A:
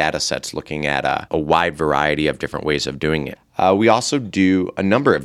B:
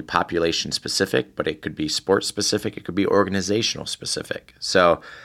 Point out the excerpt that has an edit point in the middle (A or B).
A